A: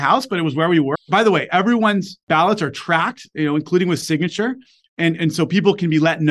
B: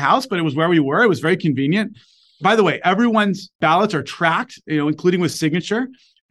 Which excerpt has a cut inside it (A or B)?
A